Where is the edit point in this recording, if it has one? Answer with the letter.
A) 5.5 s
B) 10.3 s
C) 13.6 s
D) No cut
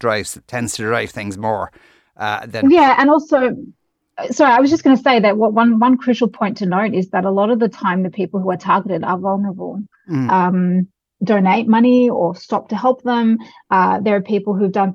B